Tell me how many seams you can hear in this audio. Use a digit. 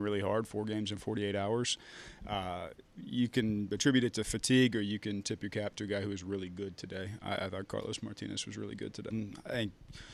1